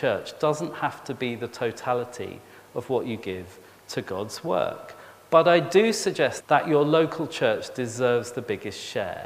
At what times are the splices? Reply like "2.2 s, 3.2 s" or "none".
6.4 s